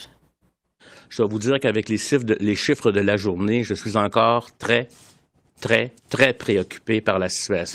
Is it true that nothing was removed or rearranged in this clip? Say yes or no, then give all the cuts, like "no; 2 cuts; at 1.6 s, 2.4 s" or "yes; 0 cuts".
no; 1 cut; at 6.0 s